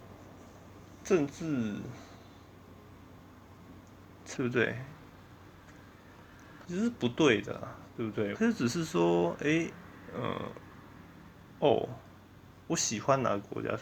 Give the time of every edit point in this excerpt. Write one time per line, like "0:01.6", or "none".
0:04.3
0:06.6
0:08.3

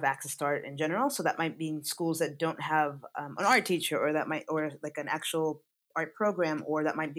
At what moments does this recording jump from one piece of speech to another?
none

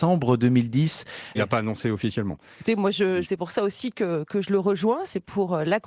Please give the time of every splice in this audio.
0:01.3
0:03.2

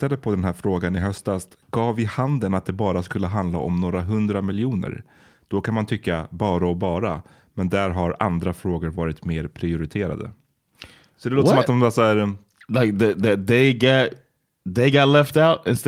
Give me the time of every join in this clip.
none

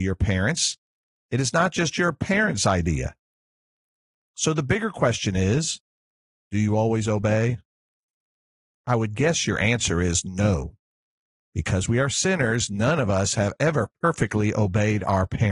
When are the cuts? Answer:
none

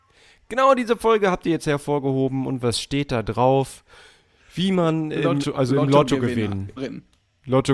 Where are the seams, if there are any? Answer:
0:05.4
0:06.8

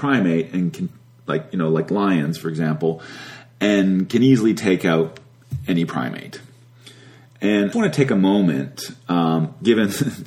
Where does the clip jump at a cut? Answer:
0:07.7

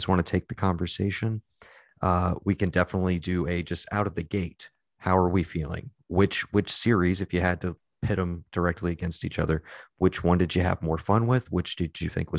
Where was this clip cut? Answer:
none

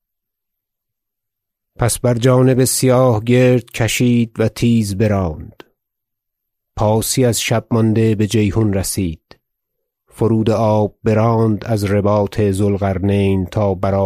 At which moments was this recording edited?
none

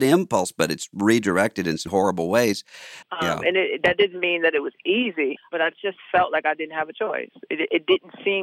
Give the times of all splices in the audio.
0:01.9
0:03.0
0:05.4

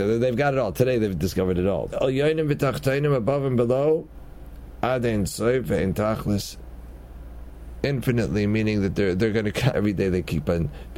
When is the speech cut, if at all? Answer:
0:01.9
0:09.7

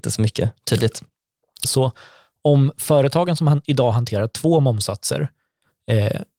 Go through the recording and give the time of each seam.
0:01.6

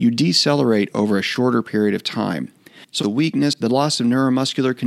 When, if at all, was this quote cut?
0:03.0

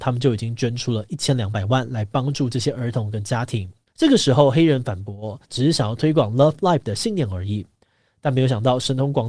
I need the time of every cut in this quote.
0:03.9
0:05.4

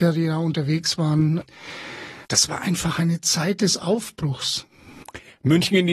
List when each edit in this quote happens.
0:02.2

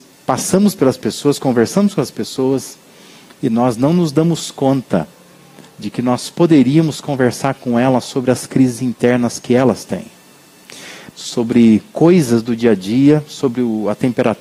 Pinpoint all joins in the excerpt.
0:11.1

